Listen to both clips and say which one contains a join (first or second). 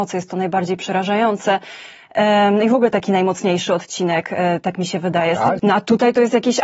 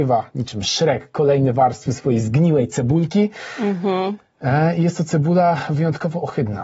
first